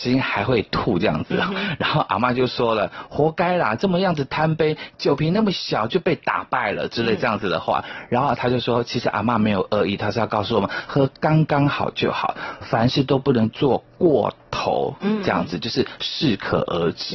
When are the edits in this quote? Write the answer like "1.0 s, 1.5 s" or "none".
none